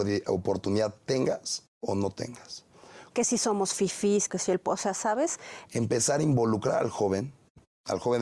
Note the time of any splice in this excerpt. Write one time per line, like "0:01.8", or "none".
0:03.1
0:04.3
0:05.6